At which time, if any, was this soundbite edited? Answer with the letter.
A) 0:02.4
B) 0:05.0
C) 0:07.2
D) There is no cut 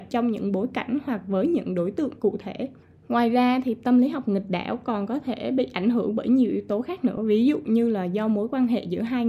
D